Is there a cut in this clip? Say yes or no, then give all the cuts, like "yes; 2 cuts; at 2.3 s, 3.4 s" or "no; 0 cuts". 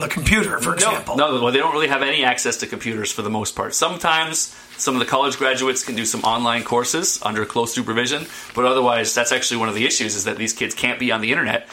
no; 0 cuts